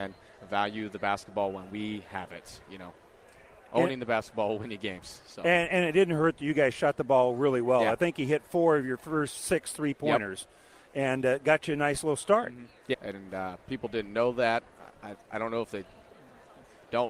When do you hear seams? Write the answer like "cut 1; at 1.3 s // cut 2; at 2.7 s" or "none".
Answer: cut 1; at 12.9 s